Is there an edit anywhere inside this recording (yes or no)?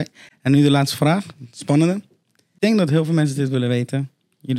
no